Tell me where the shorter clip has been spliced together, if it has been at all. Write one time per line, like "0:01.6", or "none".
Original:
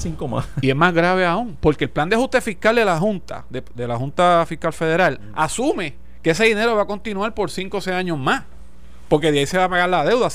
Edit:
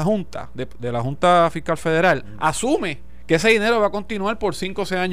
none